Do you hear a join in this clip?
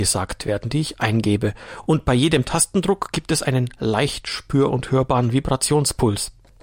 no; 0 cuts

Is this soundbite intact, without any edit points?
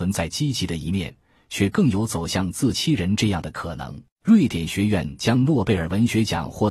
no; 2 cuts; at 2.7 s, 4.1 s

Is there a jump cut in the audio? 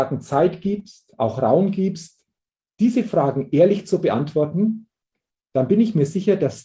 no; 0 cuts

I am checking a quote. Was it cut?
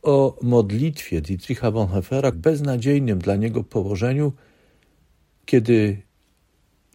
yes; 1 cut; at 2.3 s

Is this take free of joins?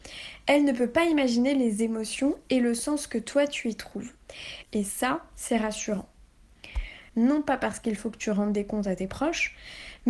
no; 2 cuts; at 4.6 s, 7.1 s

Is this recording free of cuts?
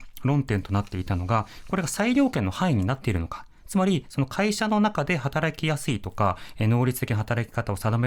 yes; 0 cuts

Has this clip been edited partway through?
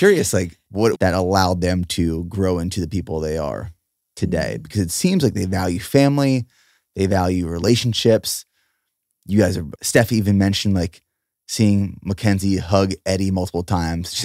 yes; 2 cuts; at 1.0 s, 9.7 s

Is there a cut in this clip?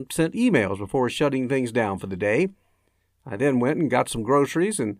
no; 0 cuts

